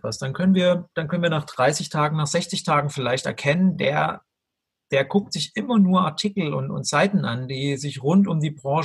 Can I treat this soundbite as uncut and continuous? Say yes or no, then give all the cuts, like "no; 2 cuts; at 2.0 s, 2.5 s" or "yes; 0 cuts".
yes; 0 cuts